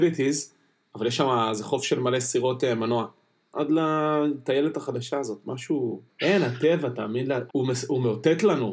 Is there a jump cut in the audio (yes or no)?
yes